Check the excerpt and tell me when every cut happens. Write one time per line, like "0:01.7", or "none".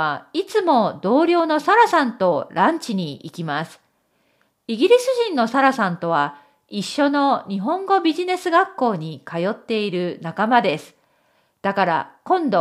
none